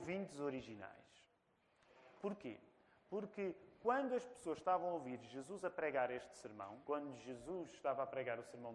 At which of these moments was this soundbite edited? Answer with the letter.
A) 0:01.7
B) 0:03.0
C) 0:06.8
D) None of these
C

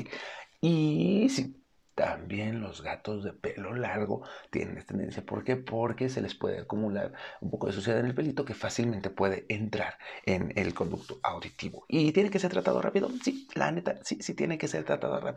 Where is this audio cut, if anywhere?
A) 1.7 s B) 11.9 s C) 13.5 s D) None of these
D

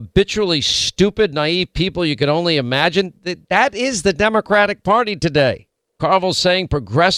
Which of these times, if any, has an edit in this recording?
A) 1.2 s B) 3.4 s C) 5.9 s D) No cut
C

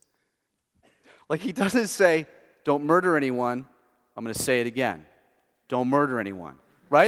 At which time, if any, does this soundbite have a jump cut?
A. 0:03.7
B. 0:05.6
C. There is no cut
C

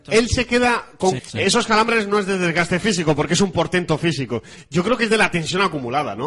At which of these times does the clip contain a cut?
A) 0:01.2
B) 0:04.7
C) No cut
A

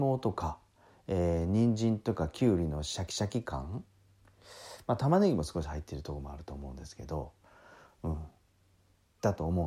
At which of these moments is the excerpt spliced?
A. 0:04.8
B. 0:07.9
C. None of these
C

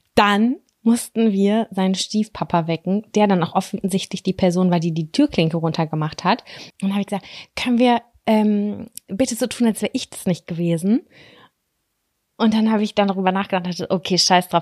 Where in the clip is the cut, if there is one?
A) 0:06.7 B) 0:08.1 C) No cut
A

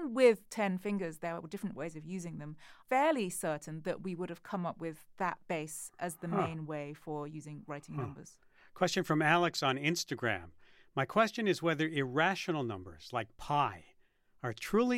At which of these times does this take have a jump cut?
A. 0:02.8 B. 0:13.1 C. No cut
A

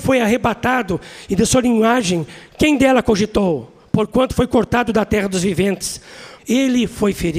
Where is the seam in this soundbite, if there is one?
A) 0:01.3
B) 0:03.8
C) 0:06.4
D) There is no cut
C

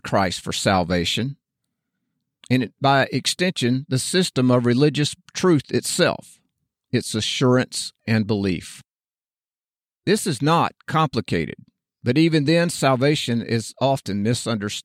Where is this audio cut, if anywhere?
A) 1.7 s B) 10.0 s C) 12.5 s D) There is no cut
D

